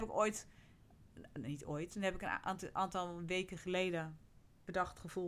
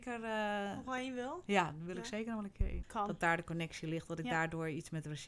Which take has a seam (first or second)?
second